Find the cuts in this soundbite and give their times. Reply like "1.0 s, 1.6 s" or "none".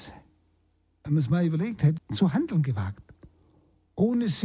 2.0 s